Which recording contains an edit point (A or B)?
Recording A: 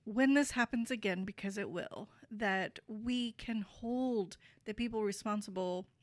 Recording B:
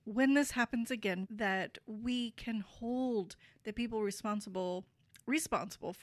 B